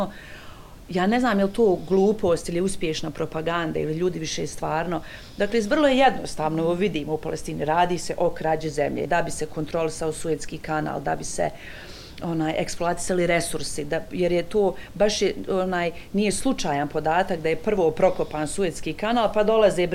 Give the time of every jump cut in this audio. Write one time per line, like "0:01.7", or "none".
0:09.0